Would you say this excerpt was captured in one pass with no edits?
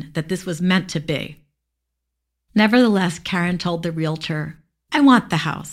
yes; 0 cuts

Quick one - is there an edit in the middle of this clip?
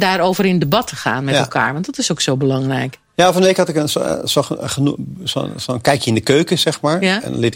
no; 0 cuts

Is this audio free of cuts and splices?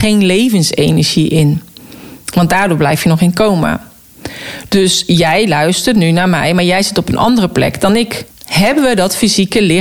no; 2 cuts; at 4.7 s, 8.3 s

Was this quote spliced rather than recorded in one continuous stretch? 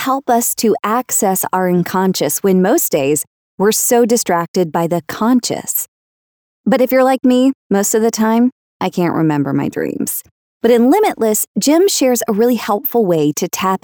no; 0 cuts

